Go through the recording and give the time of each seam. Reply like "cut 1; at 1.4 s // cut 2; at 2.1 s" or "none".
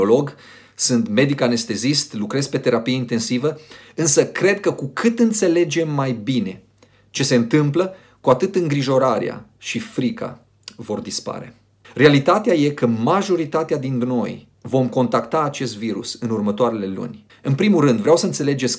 cut 1; at 11.8 s // cut 2; at 14.5 s // cut 3; at 17.3 s